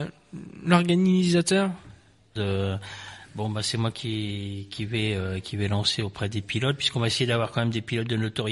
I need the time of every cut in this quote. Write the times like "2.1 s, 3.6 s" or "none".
2.4 s